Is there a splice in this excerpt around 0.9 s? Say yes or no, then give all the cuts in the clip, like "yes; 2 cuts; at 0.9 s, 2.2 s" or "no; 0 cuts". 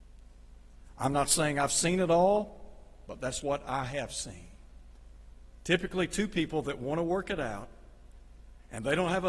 no; 1 cut; at 3.4 s